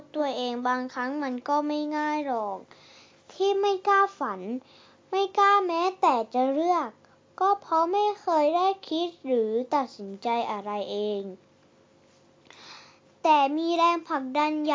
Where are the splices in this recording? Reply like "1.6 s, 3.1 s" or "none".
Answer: none